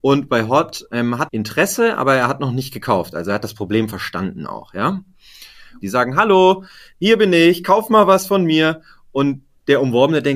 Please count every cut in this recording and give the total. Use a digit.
2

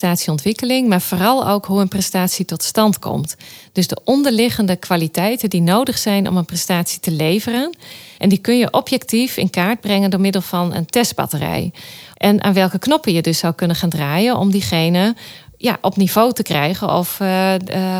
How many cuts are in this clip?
2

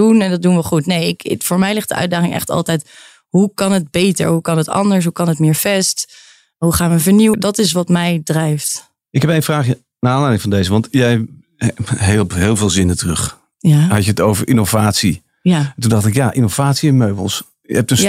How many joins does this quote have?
1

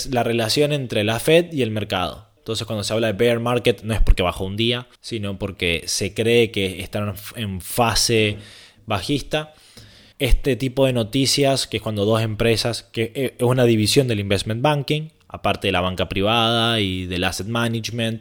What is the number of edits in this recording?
3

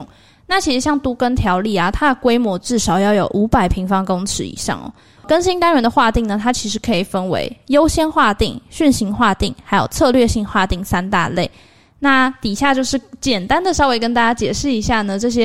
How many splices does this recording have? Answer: 1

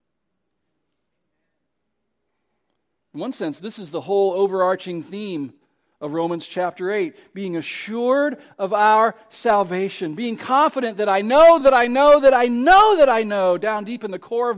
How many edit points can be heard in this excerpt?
0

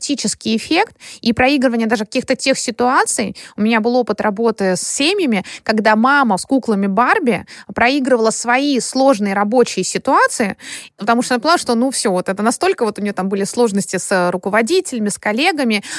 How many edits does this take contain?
0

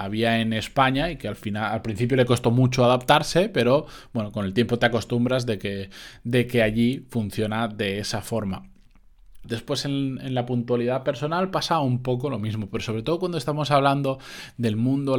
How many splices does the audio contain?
1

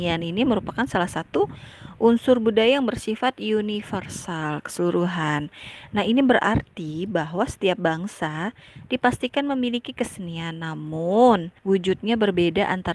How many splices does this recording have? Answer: 1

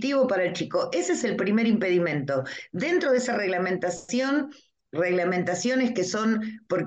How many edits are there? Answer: 0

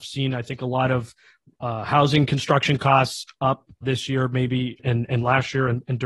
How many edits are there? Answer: 1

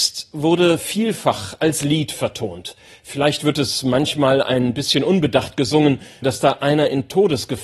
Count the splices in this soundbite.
1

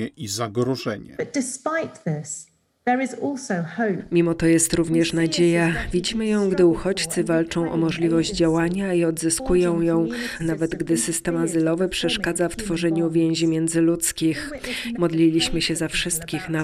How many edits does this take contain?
2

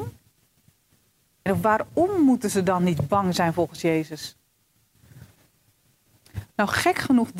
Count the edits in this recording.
1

